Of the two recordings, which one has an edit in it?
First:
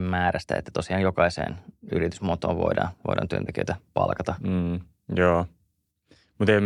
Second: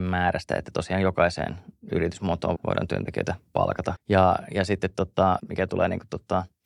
second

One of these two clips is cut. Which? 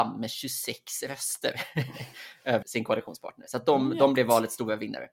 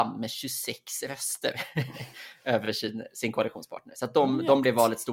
first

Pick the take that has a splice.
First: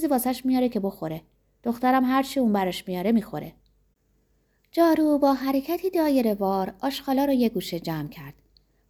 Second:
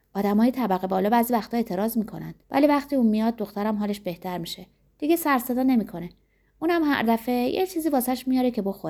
second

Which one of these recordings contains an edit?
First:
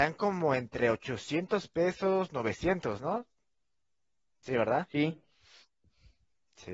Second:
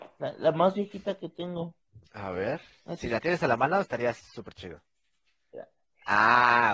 second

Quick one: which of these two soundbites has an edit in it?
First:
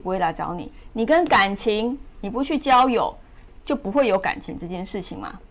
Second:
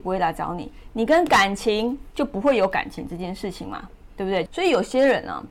second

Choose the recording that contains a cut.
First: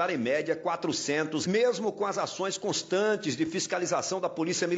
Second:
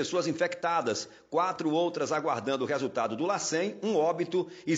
first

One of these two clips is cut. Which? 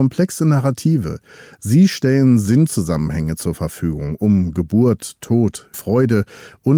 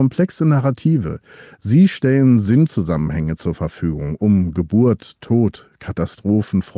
first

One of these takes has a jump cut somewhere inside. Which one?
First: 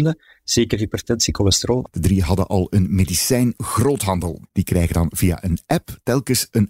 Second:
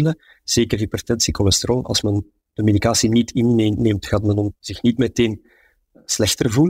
first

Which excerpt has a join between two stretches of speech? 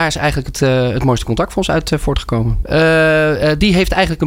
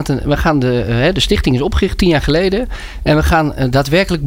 first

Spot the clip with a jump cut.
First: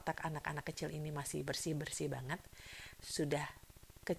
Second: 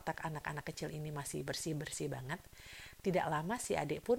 first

